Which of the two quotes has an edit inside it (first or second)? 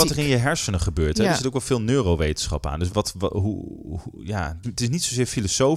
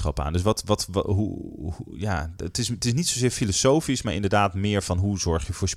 first